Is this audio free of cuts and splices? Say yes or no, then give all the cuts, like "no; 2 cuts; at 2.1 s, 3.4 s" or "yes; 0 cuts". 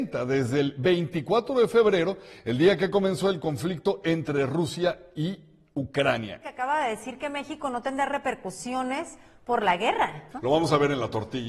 no; 2 cuts; at 6.4 s, 10.3 s